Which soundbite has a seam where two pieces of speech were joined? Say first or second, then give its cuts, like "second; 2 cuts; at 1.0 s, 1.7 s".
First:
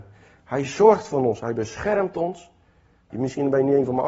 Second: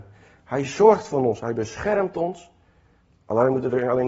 first; 1 cut; at 3.1 s